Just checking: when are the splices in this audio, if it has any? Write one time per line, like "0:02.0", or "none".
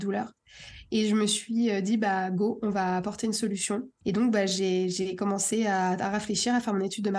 none